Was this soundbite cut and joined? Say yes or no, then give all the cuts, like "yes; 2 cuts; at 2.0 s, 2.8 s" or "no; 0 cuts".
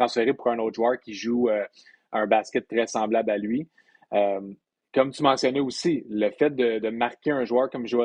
no; 0 cuts